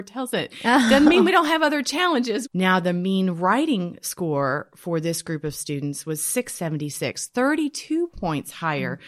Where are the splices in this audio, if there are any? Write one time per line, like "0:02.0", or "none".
0:02.4